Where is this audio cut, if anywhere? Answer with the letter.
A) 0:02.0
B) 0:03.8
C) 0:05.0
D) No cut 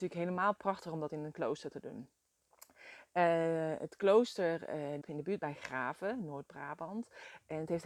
C